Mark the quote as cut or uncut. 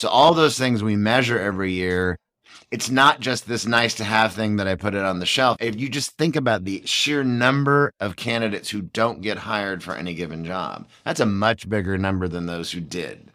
cut